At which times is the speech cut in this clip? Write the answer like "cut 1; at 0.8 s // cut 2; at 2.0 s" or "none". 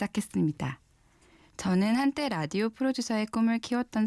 cut 1; at 1.5 s